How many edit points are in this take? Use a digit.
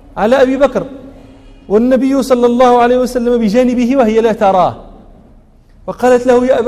0